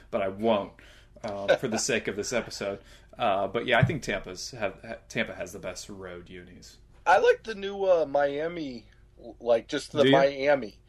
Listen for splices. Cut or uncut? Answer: uncut